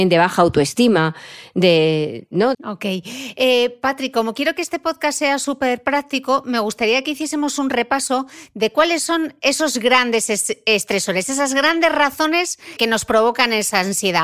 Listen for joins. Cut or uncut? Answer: cut